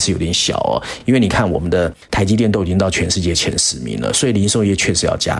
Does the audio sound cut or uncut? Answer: uncut